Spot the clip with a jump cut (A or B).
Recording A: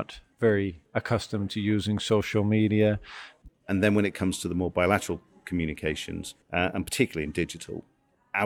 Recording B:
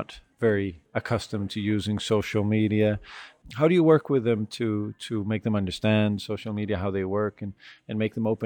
A